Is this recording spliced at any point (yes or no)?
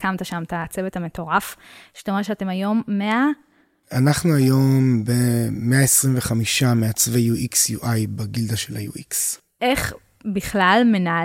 no